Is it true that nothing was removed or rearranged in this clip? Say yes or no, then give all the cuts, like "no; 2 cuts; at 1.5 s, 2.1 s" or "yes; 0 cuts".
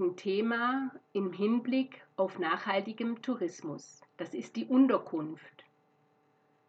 no; 1 cut; at 4.1 s